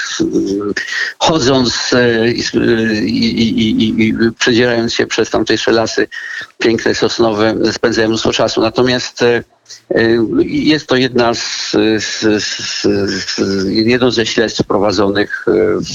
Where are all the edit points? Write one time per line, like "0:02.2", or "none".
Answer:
none